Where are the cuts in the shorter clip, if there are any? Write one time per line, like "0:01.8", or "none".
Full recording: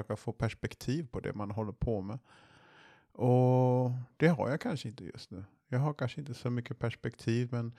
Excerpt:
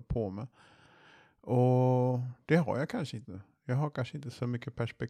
0:03.2